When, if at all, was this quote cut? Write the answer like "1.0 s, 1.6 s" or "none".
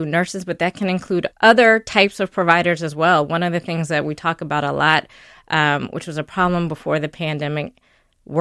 1.3 s